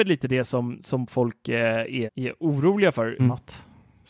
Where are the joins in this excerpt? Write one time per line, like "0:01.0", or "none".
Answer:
0:02.1
0:03.2